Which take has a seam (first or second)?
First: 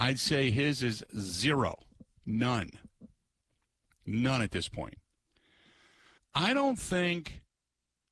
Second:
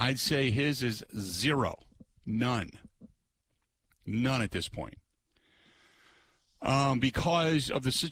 first